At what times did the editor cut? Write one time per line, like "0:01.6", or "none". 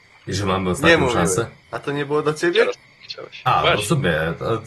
0:01.6